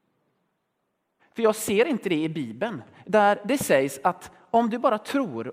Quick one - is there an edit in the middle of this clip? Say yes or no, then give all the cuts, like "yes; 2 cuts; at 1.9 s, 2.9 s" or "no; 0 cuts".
yes; 2 cuts; at 1.2 s, 3.0 s